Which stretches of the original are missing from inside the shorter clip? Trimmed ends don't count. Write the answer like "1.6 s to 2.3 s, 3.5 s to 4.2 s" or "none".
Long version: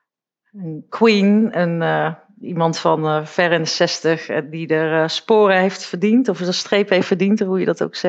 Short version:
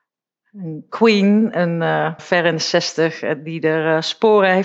2.2 s to 3.3 s